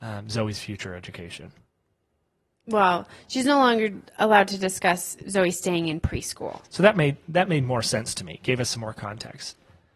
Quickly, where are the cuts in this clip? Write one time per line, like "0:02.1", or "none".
0:06.6